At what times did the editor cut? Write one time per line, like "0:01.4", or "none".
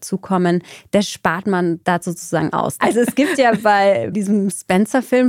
0:02.8